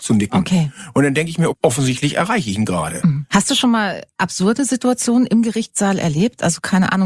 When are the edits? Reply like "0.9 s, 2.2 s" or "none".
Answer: 1.5 s, 3.3 s